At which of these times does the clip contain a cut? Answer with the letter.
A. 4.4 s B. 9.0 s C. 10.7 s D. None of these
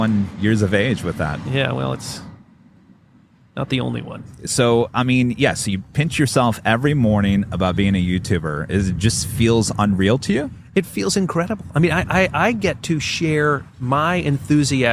D